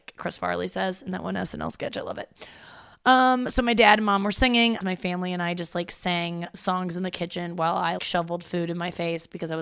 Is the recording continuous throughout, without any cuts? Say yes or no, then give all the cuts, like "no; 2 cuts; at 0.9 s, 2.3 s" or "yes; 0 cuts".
no; 3 cuts; at 4.8 s, 6.5 s, 8.0 s